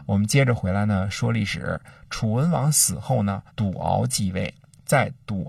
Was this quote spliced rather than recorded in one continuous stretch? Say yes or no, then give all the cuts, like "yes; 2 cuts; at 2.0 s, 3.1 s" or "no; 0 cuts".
yes; 1 cut; at 3.5 s